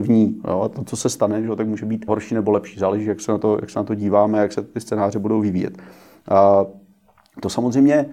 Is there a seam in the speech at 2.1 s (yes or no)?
yes